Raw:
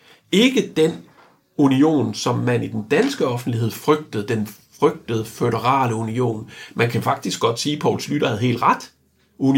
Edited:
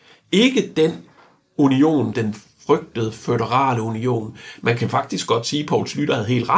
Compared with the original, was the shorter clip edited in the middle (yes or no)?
yes